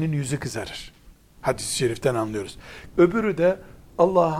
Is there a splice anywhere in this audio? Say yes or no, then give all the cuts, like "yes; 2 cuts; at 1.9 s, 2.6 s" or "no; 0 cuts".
yes; 1 cut; at 2.9 s